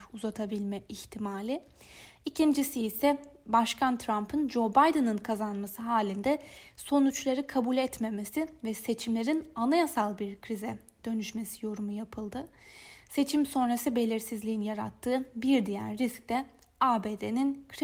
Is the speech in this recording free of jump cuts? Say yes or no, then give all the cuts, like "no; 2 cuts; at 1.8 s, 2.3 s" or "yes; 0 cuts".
yes; 0 cuts